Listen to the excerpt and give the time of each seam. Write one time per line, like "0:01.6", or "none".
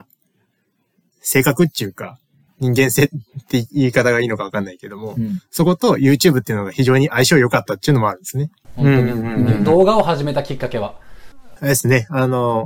0:08.6
0:11.6